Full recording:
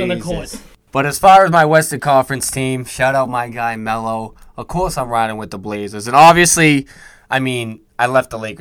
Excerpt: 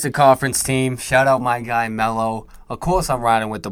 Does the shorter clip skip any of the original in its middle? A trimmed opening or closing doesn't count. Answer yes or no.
no